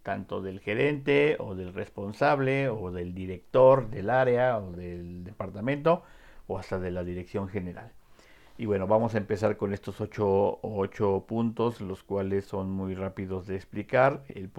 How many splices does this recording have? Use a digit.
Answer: 0